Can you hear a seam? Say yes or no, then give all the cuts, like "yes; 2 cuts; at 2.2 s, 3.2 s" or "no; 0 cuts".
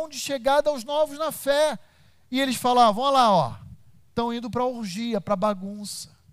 no; 0 cuts